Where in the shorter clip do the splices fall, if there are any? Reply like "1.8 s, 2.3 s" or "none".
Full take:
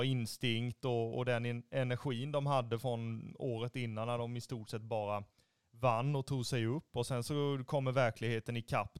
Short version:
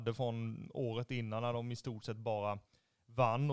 none